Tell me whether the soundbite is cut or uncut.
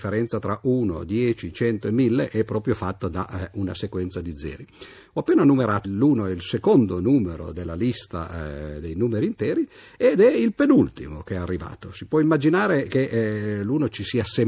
cut